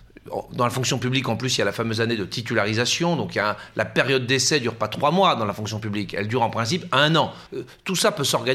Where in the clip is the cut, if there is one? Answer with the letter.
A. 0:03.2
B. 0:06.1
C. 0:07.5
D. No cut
C